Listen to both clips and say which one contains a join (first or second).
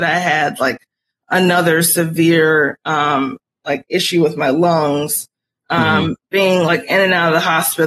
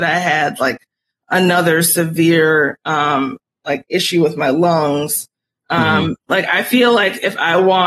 second